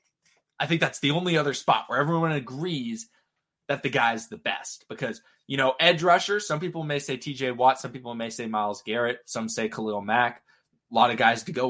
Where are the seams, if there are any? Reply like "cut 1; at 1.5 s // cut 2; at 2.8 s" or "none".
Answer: none